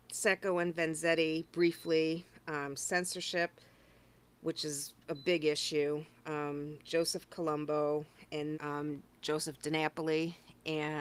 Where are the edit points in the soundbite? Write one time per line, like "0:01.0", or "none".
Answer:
0:08.5